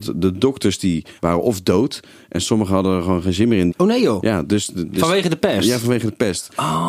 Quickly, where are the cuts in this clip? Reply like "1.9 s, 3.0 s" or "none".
1.2 s, 3.7 s